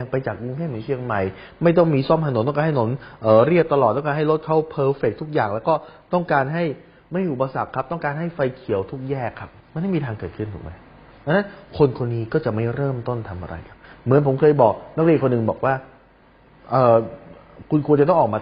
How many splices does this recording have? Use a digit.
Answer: 1